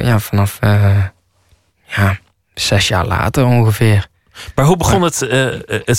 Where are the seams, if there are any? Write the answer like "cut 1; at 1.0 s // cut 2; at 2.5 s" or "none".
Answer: none